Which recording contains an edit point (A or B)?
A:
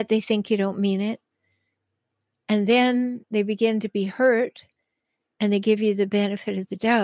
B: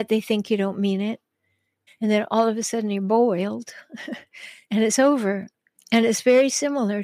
B